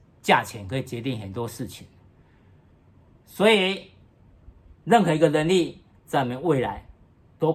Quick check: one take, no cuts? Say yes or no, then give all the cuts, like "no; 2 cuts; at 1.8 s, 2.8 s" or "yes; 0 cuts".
yes; 0 cuts